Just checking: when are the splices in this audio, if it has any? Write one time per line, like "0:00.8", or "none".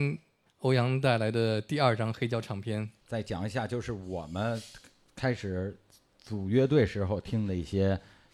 0:03.0

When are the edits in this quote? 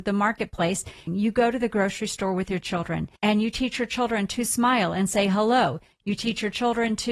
0:01.1
0:03.2

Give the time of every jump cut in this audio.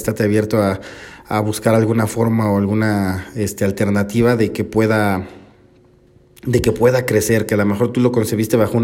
none

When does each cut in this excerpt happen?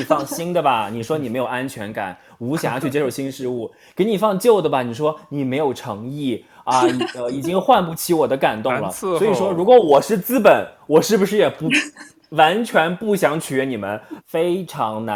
0:14.2

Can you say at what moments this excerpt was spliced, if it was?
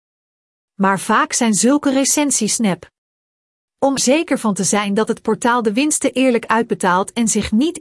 0:04.0

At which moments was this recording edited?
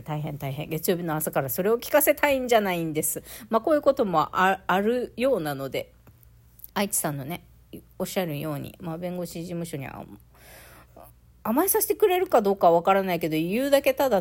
0:06.7

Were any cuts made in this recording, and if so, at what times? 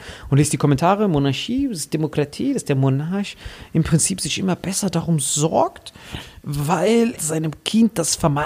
0:07.2

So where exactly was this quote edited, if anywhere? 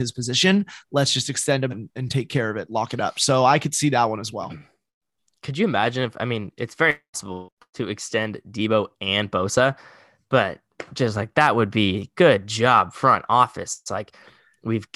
0:01.7

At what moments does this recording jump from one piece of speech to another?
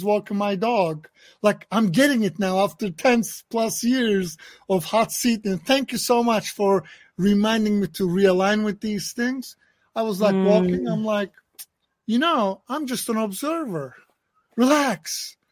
none

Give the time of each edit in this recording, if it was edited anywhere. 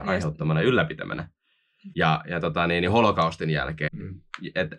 0:01.9
0:03.9

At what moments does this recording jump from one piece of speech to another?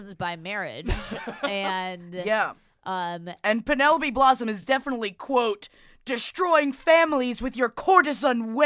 none

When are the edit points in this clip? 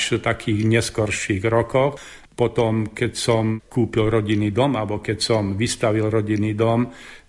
0:02.2

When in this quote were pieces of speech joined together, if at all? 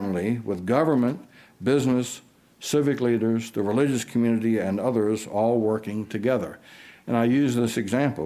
none

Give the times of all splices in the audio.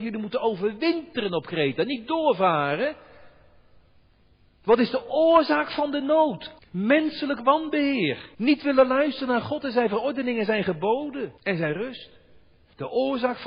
0:06.6
0:08.3
0:11.4

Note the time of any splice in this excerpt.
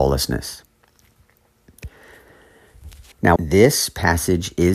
0:03.4

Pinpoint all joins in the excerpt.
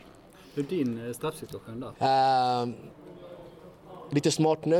0:01.9

